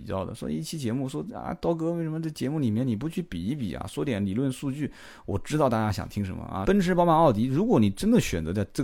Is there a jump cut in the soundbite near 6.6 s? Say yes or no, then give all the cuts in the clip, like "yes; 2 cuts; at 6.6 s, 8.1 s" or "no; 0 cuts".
yes; 1 cut; at 6.6 s